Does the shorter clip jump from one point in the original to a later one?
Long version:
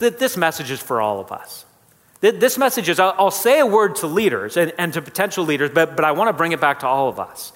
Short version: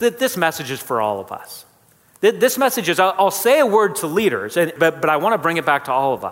yes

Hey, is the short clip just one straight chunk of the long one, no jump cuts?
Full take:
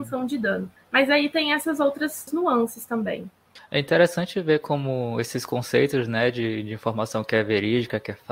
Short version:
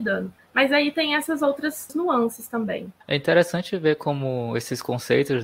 no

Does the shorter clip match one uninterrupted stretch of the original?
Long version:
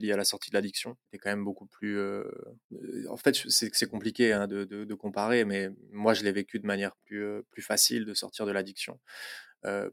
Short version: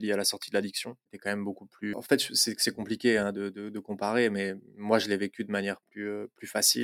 no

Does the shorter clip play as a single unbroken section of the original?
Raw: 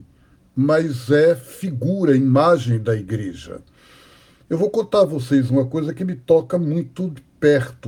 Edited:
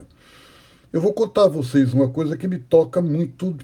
yes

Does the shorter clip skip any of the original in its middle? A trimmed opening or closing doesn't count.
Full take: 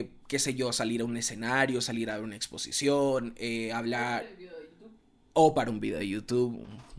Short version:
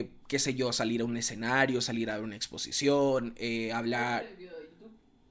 no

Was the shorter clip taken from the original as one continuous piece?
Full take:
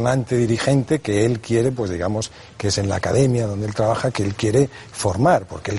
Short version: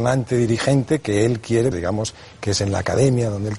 no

